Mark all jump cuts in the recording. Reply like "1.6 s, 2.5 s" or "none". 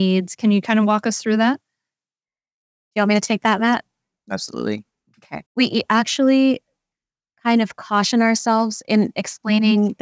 5.5 s